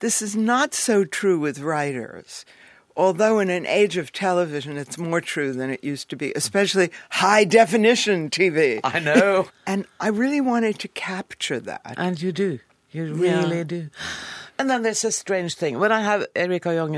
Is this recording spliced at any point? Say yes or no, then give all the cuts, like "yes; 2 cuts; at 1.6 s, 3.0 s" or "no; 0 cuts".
yes; 1 cut; at 9.5 s